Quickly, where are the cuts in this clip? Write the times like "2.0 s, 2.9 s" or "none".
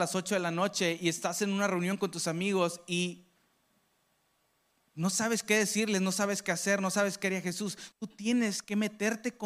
7.9 s